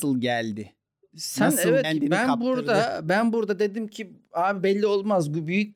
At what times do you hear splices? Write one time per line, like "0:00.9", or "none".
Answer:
0:01.8